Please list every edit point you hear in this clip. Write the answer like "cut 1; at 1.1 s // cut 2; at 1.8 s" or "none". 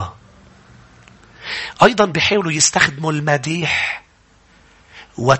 none